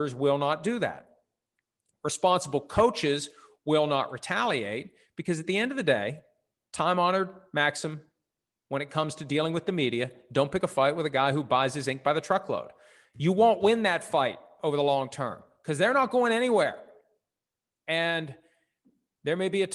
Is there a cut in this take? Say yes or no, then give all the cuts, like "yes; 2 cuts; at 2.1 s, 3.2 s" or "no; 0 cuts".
no; 0 cuts